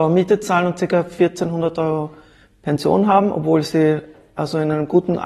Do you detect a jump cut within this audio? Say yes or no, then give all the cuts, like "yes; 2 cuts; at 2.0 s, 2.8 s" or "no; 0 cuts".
no; 0 cuts